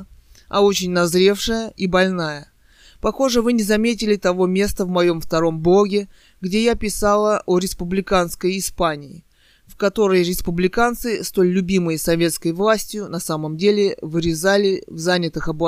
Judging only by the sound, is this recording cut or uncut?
uncut